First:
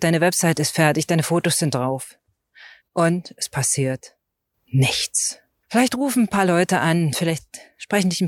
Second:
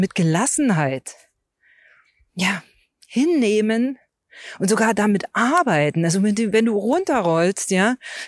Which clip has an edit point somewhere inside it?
first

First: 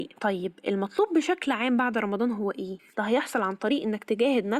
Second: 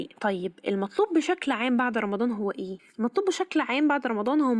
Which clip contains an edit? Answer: first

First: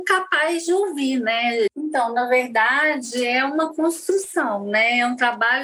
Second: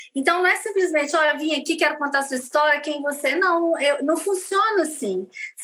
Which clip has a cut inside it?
first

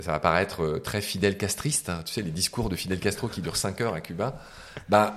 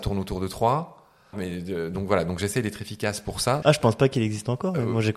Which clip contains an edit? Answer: second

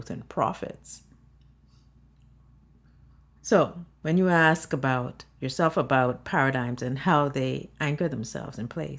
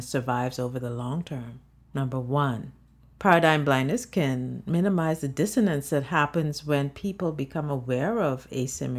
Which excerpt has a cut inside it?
second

